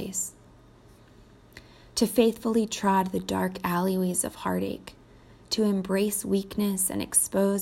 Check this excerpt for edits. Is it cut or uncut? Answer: uncut